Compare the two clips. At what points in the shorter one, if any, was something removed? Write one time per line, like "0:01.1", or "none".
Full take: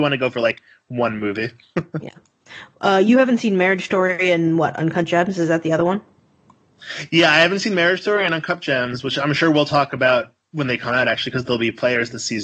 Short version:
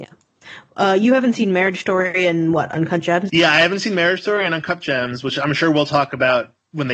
0:03.3